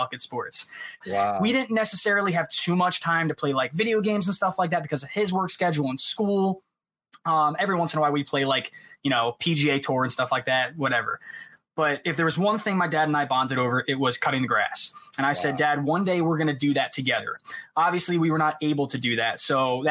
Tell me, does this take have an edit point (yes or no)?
yes